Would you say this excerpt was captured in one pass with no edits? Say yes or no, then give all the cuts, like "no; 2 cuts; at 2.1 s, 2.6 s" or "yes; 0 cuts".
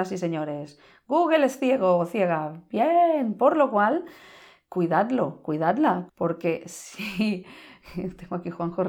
no; 1 cut; at 6.1 s